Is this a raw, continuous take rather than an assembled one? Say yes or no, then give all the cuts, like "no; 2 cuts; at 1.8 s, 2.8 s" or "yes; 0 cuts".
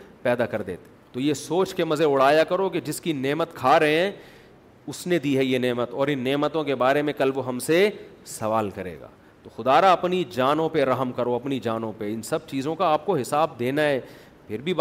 no; 1 cut; at 1.0 s